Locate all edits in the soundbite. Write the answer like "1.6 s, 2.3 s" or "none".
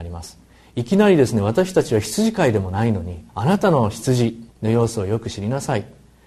3.3 s, 4.5 s